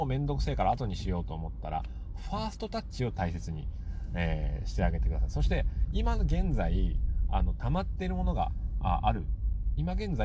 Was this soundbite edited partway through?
no; 0 cuts

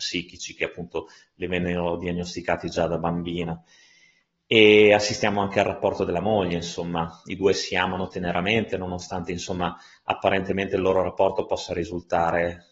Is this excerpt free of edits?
yes; 0 cuts

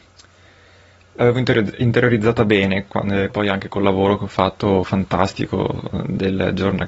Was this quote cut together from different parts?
yes; 1 cut; at 3.3 s

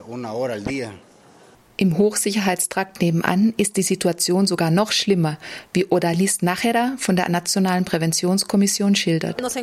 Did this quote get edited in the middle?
no; 0 cuts

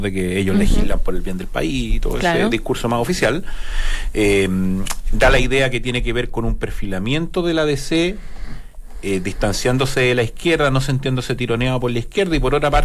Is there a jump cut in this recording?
no; 0 cuts

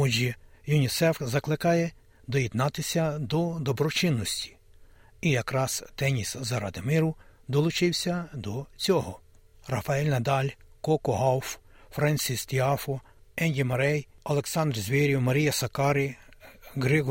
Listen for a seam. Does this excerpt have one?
no; 0 cuts

